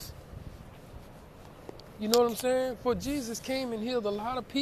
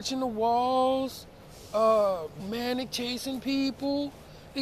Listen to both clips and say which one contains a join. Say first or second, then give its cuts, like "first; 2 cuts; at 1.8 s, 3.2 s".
second; 1 cut; at 2.4 s